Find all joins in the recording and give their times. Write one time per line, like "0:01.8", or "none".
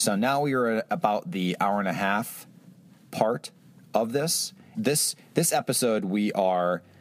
0:04.7